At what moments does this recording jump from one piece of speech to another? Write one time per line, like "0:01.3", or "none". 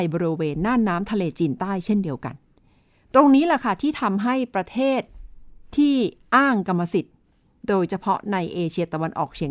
none